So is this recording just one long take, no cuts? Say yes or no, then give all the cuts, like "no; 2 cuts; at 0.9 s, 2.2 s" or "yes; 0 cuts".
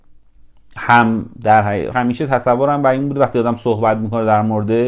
no; 1 cut; at 1.9 s